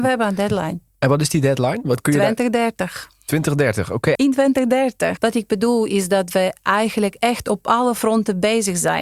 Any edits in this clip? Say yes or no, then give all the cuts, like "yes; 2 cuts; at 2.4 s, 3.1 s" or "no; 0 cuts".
yes; 2 cuts; at 4.2 s, 5.2 s